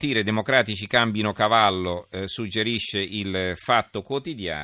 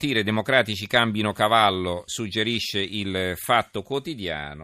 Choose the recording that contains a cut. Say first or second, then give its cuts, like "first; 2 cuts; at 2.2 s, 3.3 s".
second; 1 cut; at 2.1 s